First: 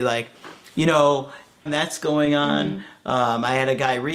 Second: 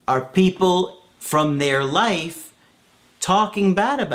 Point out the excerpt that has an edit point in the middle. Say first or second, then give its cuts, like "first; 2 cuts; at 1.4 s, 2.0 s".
first; 1 cut; at 1.7 s